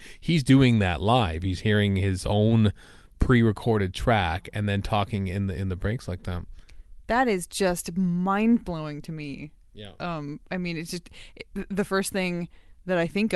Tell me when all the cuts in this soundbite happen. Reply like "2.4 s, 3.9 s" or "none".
none